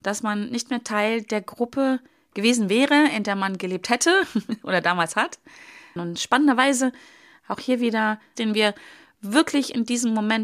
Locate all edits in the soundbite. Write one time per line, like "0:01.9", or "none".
0:06.0
0:08.4